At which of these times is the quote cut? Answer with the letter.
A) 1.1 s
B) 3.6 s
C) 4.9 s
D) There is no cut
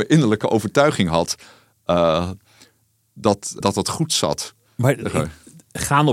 B